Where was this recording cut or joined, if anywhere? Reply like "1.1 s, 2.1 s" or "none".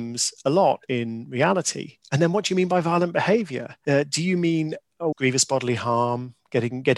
5.1 s